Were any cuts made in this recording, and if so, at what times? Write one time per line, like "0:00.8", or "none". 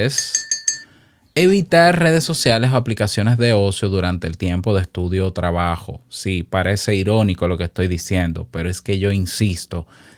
none